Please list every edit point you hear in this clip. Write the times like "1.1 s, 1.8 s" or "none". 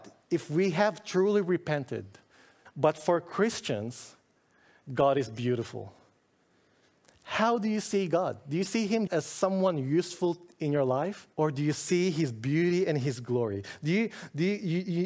2.7 s, 9.1 s, 11.3 s